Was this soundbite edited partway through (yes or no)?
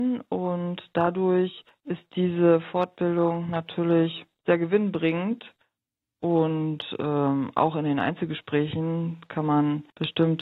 no